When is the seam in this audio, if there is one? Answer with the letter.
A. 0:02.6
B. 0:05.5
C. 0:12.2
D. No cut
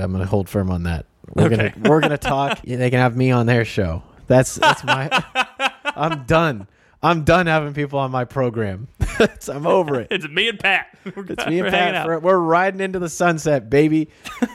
A